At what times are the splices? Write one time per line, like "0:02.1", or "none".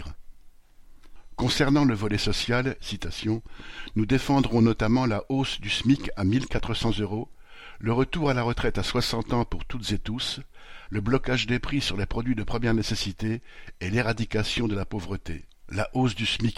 0:02.8
0:10.9
0:15.5